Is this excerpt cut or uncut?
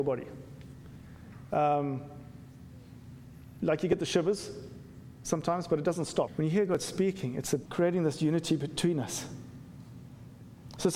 cut